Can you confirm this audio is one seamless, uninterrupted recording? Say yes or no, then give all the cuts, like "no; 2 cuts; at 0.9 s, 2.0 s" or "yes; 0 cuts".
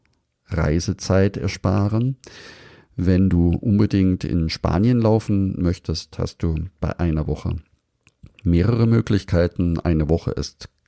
yes; 0 cuts